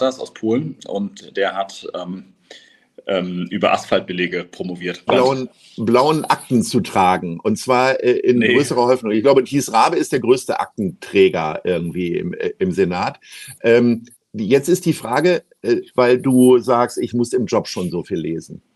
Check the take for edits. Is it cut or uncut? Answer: cut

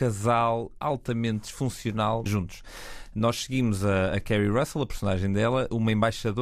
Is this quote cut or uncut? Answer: cut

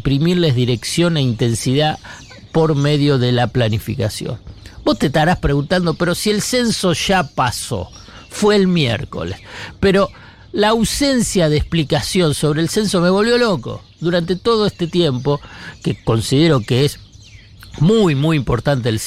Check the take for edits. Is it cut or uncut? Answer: cut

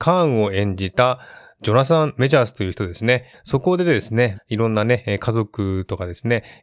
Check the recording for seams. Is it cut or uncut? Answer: cut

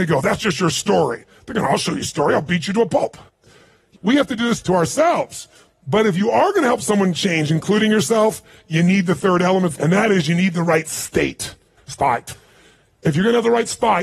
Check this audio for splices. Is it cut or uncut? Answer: cut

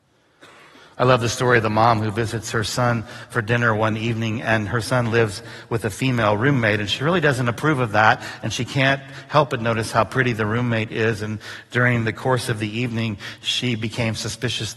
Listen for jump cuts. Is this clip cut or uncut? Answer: uncut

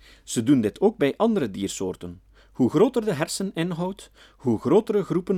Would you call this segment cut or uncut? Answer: uncut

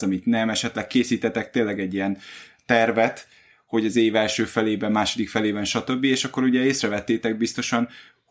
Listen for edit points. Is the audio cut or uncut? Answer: uncut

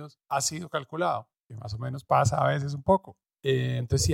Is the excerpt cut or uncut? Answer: uncut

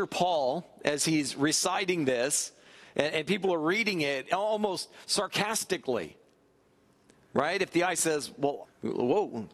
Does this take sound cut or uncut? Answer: cut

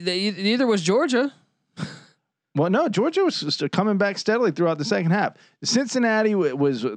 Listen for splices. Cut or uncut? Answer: uncut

